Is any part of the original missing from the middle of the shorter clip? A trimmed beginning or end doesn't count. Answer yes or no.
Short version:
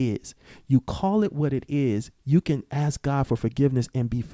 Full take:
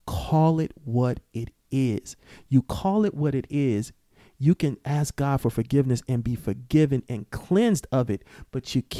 yes